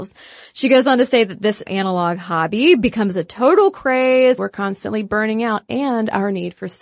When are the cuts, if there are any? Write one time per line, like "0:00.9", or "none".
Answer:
0:01.7
0:04.4